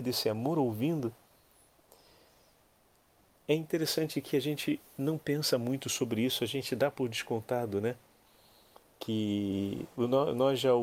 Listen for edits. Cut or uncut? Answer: uncut